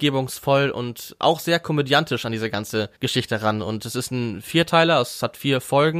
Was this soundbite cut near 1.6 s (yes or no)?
no